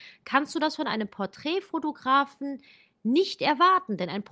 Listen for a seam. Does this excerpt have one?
no; 0 cuts

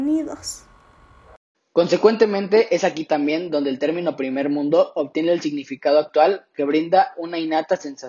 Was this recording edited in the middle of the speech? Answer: yes; 1 cut; at 1.5 s

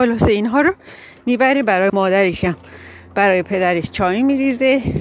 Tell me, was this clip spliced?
yes; 1 cut; at 1.9 s

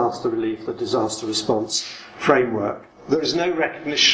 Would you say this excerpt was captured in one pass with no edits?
no; 1 cut; at 2.9 s

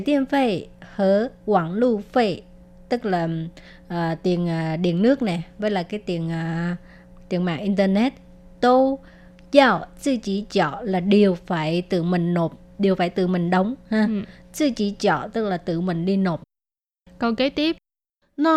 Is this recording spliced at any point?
no; 0 cuts

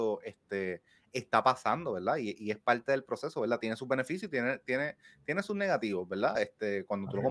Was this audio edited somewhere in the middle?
no; 0 cuts

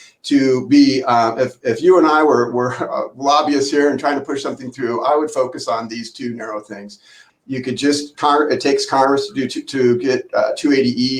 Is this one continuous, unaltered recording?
no; 1 cut; at 7.3 s

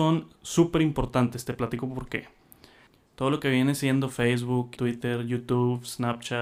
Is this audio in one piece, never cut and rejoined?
no; 2 cuts; at 3.1 s, 4.8 s

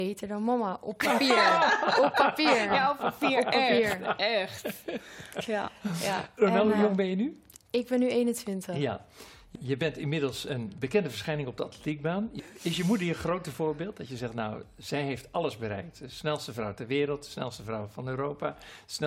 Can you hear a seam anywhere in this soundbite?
no; 0 cuts

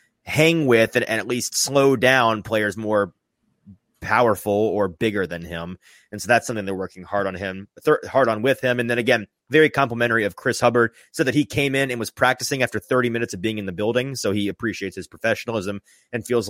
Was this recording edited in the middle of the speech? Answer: no; 0 cuts

